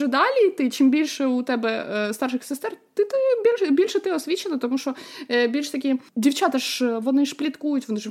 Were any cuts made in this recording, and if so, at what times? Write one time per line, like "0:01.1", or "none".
none